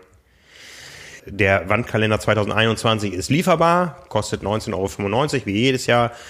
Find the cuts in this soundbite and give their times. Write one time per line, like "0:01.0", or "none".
0:01.2